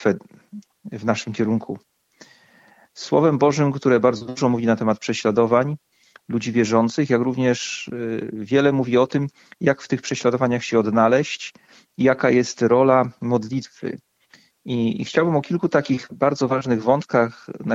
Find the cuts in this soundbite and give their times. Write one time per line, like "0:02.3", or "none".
0:02.8